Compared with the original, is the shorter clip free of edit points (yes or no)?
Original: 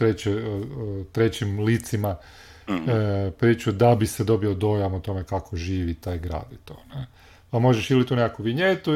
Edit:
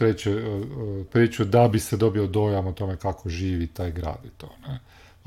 no